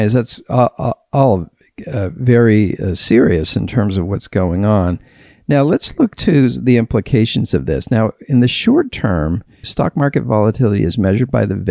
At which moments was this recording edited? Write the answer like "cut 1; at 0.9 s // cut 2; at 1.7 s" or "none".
cut 1; at 9.6 s